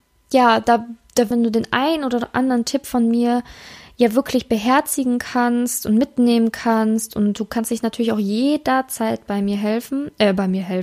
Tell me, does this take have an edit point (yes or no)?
yes